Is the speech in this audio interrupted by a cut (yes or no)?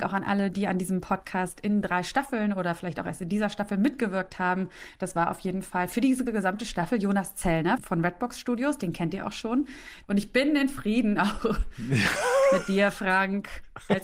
yes